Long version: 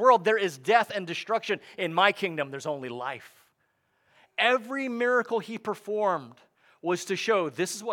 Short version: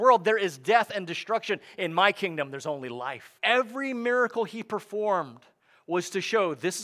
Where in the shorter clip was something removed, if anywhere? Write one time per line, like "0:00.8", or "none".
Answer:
0:03.4